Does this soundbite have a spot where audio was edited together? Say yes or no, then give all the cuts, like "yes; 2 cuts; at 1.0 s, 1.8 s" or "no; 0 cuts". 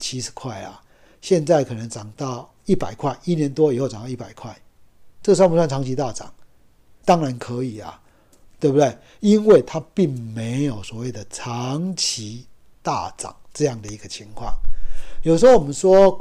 yes; 1 cut; at 7.0 s